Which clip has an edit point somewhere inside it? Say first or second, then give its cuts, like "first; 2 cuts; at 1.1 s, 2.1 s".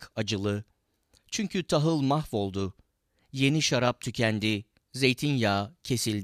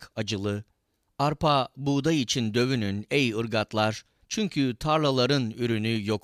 second; 2 cuts; at 1.1 s, 4.2 s